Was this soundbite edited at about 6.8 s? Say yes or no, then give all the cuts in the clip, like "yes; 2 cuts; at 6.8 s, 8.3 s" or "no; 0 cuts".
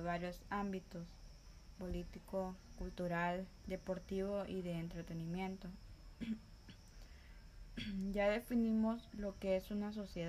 no; 1 cut; at 1.7 s